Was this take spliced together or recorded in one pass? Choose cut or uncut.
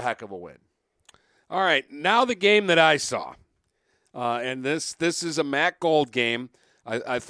uncut